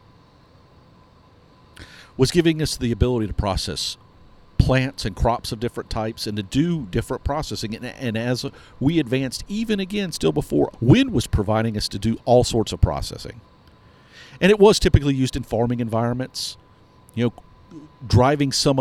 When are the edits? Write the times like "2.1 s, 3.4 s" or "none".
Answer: 10.7 s